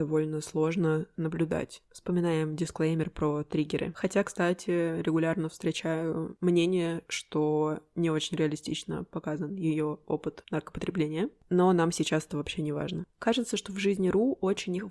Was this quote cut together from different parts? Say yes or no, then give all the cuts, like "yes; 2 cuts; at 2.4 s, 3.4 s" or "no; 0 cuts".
no; 0 cuts